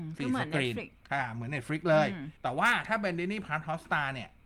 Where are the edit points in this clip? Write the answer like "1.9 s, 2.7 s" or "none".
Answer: 2.4 s